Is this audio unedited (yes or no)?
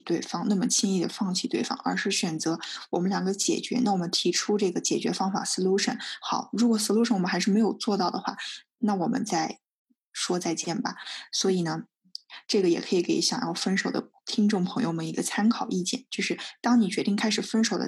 yes